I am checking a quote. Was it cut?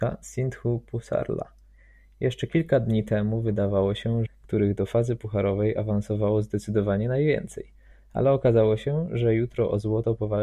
yes; 1 cut; at 4.3 s

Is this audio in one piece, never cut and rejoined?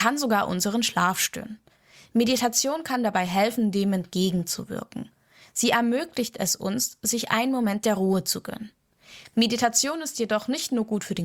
yes; 0 cuts

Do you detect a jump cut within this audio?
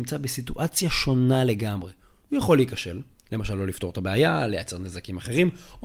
no; 0 cuts

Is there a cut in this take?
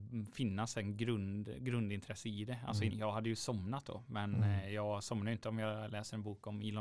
yes; 1 cut; at 2.9 s

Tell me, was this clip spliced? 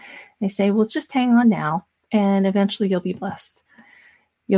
no; 0 cuts

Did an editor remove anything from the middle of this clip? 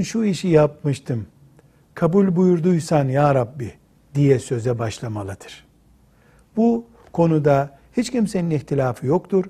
no; 0 cuts

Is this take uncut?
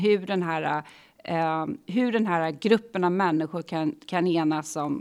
yes; 0 cuts

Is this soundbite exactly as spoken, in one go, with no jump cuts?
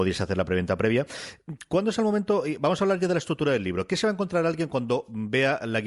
yes; 0 cuts

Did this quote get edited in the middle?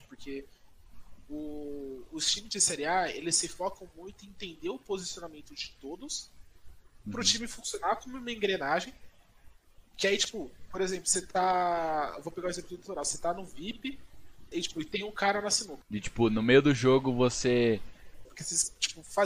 yes; 3 cuts; at 14.5 s, 15.8 s, 18.2 s

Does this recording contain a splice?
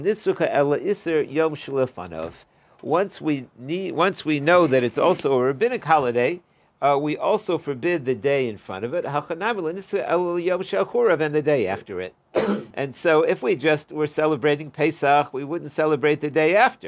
no; 0 cuts

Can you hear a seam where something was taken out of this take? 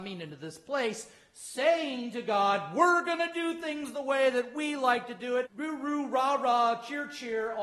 yes; 1 cut; at 5.4 s

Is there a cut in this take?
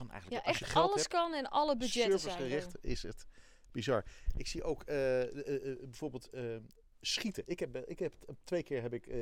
no; 0 cuts

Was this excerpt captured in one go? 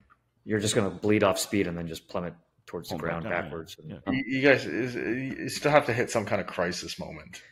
no; 1 cut; at 4.1 s

